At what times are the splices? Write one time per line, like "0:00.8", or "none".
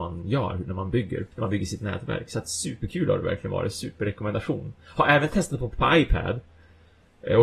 0:01.3